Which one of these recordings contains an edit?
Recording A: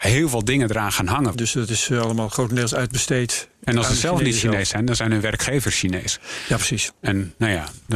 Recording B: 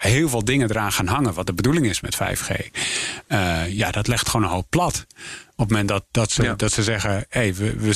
A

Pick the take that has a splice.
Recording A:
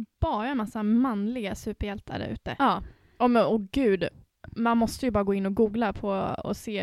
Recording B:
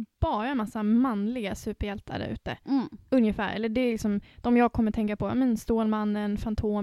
A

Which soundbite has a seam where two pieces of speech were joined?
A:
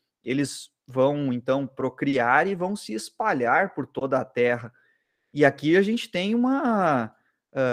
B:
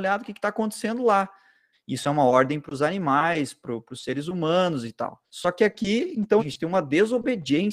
B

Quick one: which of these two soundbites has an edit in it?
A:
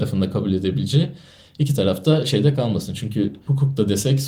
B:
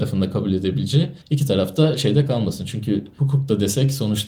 B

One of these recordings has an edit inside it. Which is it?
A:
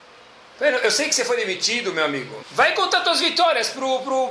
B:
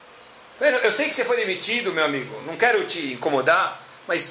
A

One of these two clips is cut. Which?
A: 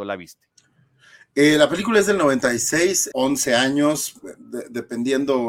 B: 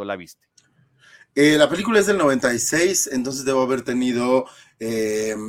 A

